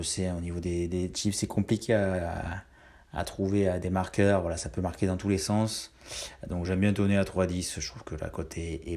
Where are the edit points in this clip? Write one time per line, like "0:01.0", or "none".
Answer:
none